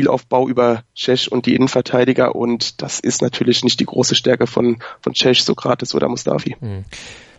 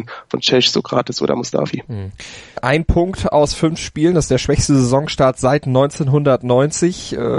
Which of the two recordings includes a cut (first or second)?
second